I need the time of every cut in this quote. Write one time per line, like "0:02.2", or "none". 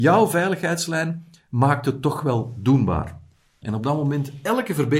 0:03.6